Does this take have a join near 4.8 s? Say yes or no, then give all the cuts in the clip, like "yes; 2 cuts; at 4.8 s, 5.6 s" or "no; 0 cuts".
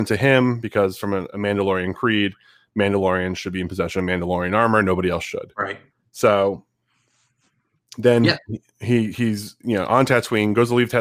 no; 0 cuts